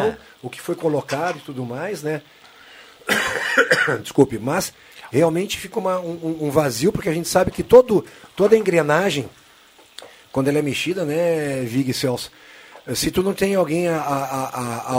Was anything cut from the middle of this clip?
no; 0 cuts

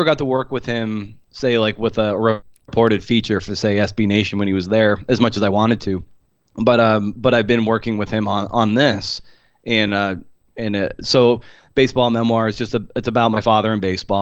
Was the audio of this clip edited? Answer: no; 0 cuts

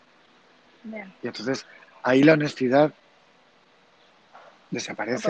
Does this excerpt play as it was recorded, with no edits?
yes; 0 cuts

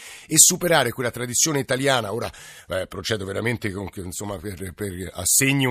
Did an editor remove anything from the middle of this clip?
no; 0 cuts

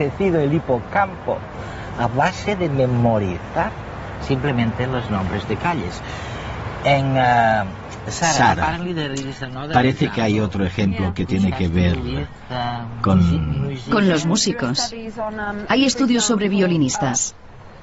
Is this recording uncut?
yes; 0 cuts

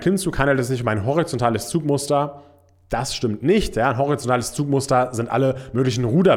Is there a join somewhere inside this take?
no; 0 cuts

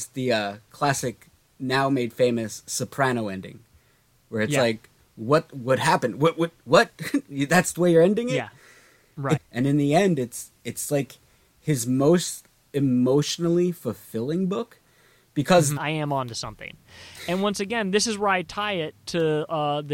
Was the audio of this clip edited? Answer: yes; 2 cuts; at 9.4 s, 15.8 s

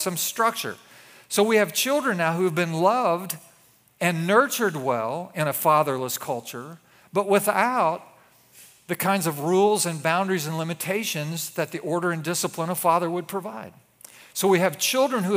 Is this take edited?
no; 0 cuts

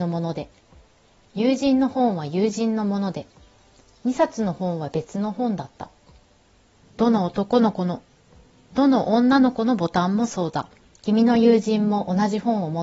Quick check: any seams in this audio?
yes; 2 cuts; at 6.8 s, 10.9 s

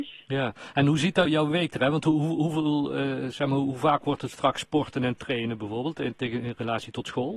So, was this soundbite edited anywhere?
yes; 1 cut; at 1.2 s

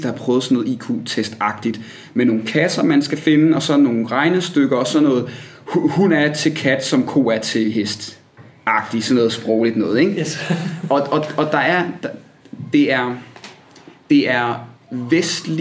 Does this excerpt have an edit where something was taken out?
no; 0 cuts

